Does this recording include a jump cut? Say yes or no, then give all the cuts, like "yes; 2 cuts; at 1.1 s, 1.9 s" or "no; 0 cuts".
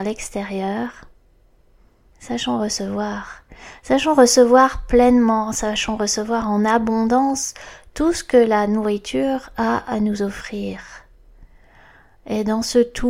no; 0 cuts